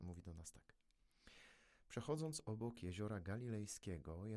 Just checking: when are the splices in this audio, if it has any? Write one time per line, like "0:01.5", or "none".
none

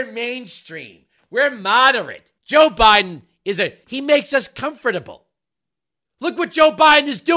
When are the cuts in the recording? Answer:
0:02.4
0:03.8

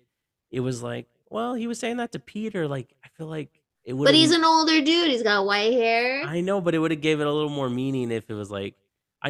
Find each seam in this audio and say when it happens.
none

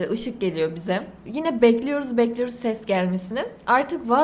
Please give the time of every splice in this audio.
0:01.3

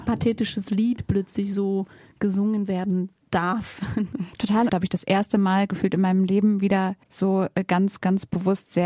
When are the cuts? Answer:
0:04.7
0:07.0

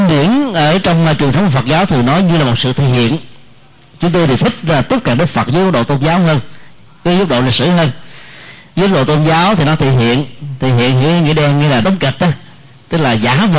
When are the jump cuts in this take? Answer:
0:11.8

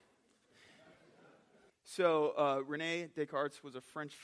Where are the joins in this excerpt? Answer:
0:01.7

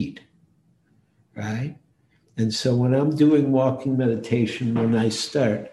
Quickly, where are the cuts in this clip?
none

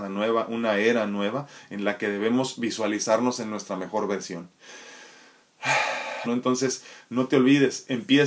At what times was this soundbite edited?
0:06.2

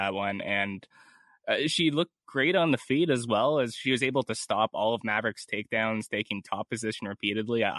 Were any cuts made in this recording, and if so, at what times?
none

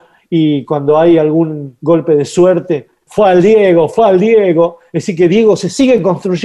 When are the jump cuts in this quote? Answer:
0:03.1

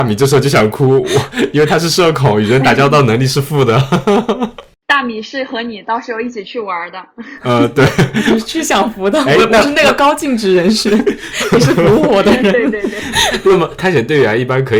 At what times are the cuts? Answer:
0:13.8

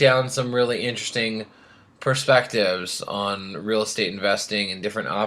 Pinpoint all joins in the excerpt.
none

